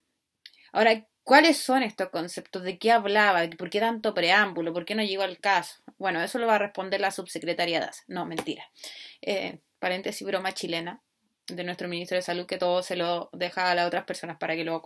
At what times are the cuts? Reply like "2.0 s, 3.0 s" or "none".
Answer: none